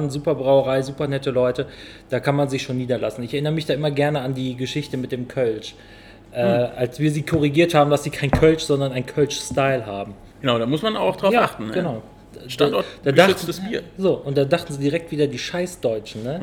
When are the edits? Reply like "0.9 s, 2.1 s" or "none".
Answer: 10.3 s